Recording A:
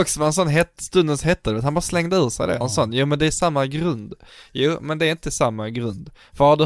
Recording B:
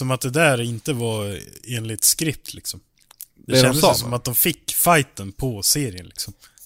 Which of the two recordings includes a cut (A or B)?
A